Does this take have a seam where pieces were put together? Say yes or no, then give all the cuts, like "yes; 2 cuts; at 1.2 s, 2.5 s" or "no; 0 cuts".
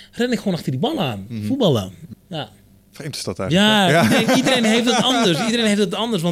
yes; 1 cut; at 2.1 s